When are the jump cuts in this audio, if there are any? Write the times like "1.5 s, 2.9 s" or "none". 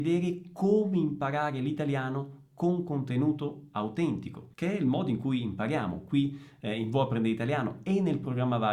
4.5 s